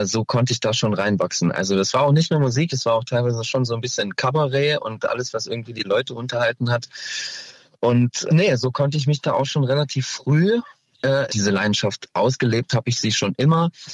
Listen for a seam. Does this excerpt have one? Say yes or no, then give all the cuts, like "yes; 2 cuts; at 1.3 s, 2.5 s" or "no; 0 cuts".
yes; 2 cuts; at 8.3 s, 11.3 s